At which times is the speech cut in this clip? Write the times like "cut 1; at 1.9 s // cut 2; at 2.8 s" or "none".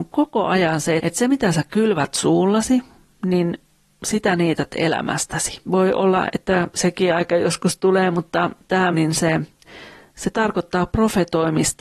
cut 1; at 1.0 s // cut 2; at 5.7 s // cut 3; at 8.9 s